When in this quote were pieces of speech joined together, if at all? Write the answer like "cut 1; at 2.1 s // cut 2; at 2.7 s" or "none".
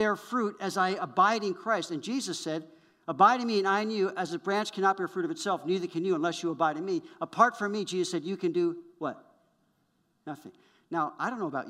none